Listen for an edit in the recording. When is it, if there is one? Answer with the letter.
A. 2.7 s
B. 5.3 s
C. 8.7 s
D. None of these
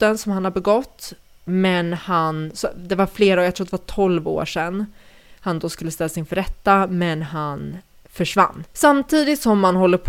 C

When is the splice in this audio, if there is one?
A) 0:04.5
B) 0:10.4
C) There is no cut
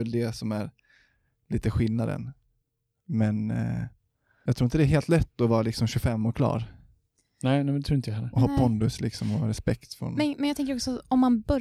A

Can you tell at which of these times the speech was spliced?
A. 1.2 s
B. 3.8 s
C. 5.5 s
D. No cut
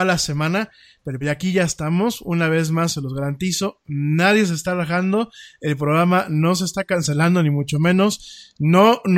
A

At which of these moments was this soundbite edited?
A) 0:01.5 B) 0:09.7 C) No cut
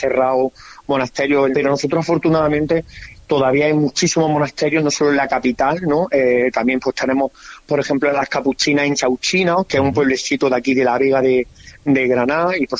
A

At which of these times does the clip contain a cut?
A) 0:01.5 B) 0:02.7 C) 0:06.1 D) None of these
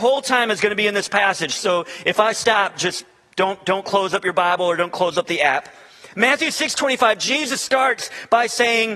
D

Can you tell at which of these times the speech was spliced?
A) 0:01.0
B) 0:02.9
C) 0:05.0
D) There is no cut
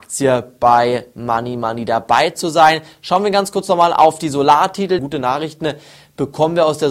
C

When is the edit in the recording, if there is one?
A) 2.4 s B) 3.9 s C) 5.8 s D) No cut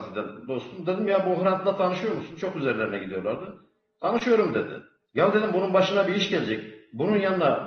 D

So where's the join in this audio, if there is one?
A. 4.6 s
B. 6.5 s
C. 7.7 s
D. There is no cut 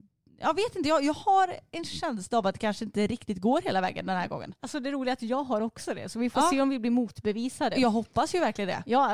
D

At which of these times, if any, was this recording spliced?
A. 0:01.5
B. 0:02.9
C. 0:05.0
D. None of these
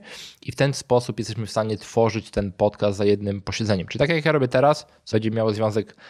D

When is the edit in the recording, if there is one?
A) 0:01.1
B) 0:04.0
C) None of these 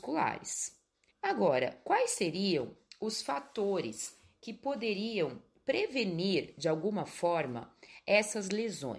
A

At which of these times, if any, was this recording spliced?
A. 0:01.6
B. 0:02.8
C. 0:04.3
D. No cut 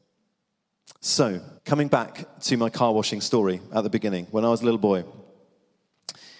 A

